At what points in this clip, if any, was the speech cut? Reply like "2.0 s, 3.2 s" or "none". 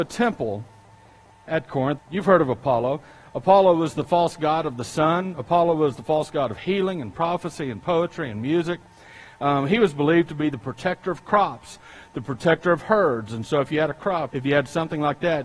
2.0 s, 14.3 s